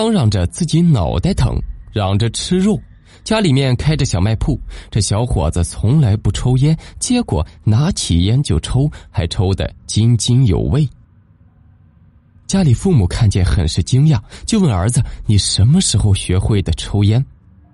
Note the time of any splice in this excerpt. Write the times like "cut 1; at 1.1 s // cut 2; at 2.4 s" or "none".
none

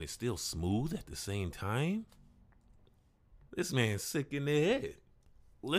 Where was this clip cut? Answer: cut 1; at 3.5 s

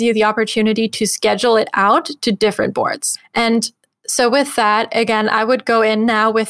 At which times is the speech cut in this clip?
none

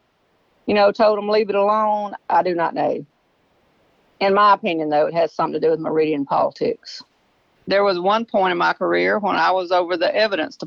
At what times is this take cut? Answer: cut 1; at 2.2 s // cut 2; at 7.6 s

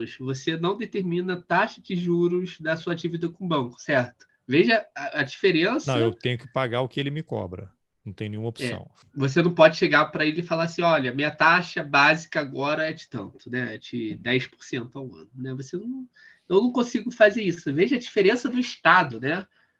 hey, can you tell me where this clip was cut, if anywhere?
none

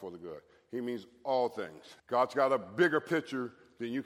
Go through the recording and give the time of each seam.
cut 1; at 2.0 s

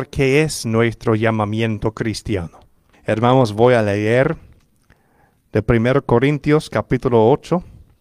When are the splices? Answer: cut 1; at 2.9 s

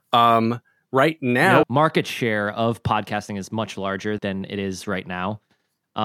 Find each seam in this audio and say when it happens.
cut 1; at 1.6 s // cut 2; at 4.2 s

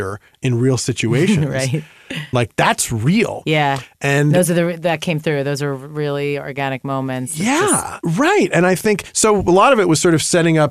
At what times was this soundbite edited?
cut 1; at 2.3 s // cut 2; at 8.0 s

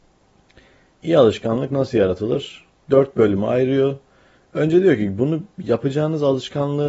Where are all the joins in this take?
none

